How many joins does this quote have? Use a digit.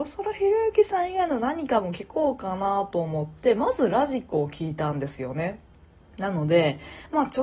1